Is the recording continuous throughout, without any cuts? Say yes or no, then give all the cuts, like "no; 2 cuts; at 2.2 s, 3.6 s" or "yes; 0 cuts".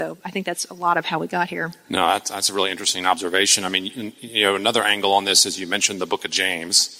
yes; 0 cuts